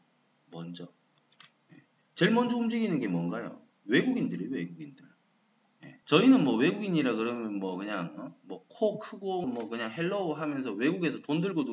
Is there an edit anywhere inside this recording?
yes; 2 cuts; at 6.0 s, 9.4 s

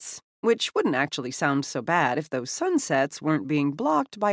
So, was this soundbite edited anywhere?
no; 0 cuts

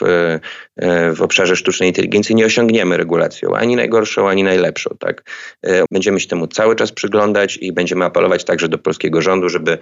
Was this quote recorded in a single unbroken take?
no; 1 cut; at 5.9 s

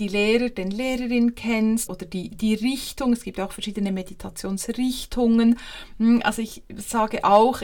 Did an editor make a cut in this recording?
yes; 1 cut; at 1.9 s

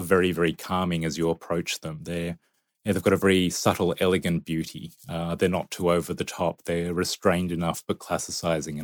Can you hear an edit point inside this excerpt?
no; 0 cuts

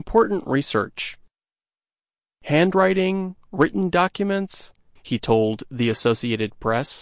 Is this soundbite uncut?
no; 1 cut; at 5.0 s

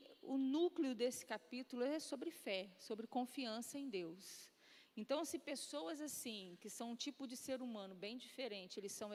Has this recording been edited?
no; 0 cuts

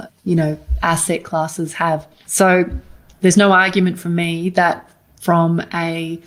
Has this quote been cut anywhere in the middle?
yes; 1 cut; at 2.2 s

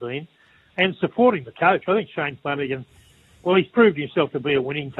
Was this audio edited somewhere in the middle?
no; 0 cuts

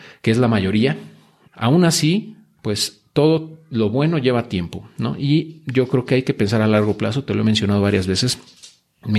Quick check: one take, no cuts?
no; 1 cut; at 1.5 s

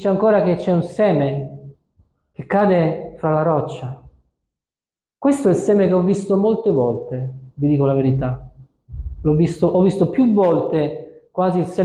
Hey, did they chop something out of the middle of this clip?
no; 0 cuts

